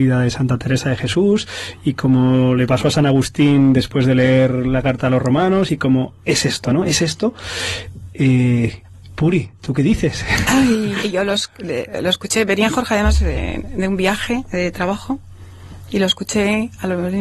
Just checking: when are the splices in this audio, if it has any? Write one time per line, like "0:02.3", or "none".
0:11.0